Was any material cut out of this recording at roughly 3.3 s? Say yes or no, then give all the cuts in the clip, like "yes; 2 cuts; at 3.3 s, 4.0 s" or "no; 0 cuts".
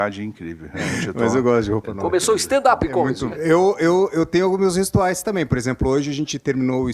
yes; 1 cut; at 3.3 s